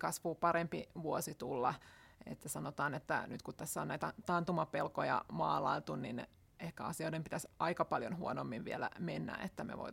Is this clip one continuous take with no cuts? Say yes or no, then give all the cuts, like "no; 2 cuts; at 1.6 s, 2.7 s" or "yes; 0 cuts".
yes; 0 cuts